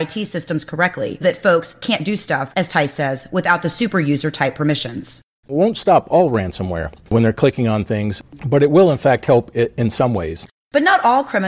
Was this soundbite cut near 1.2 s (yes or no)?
yes